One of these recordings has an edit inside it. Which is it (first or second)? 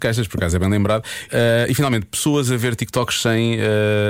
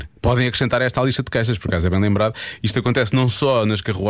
first